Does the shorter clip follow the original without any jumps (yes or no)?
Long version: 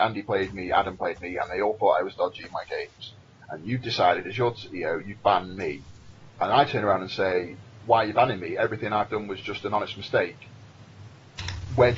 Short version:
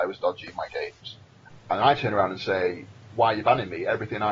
no